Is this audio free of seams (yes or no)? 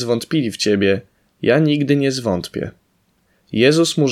yes